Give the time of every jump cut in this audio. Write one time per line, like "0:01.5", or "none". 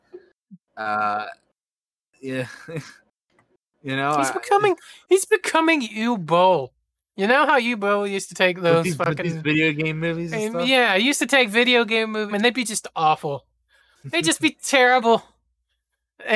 0:12.3